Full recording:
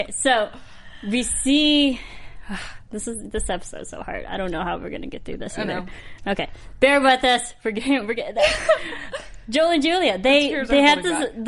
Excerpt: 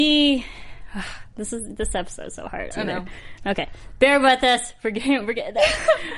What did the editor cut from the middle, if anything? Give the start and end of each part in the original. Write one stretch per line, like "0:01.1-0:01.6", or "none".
0:04.3-0:05.5